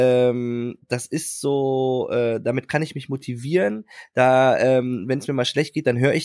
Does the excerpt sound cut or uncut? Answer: uncut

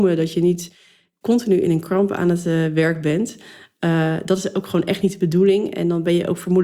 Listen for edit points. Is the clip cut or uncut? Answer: uncut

